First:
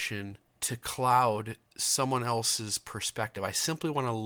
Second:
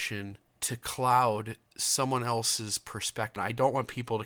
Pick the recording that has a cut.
second; 1 cut; at 3.4 s

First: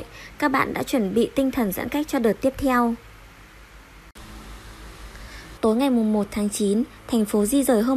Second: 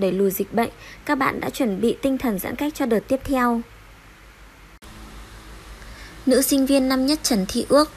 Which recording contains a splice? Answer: first; 1 cut; at 5.6 s

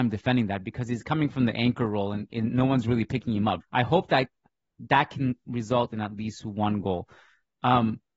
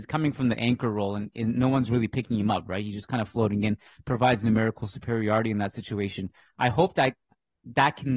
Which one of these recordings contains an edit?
first; 1 cut; at 3.6 s

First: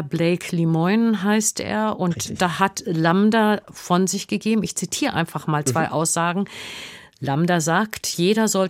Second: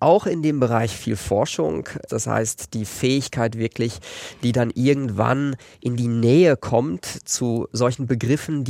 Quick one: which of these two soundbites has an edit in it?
second; 1 cut; at 2.1 s

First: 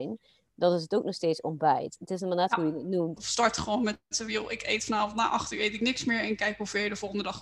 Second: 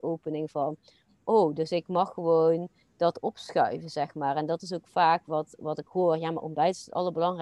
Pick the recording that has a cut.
first; 1 cut; at 3.2 s

